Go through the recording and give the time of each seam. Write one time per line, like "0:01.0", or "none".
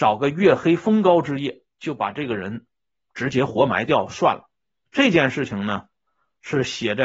0:04.9